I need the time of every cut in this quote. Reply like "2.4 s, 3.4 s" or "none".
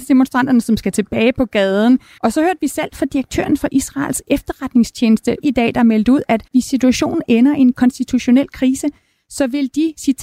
2.2 s, 5.4 s, 6.5 s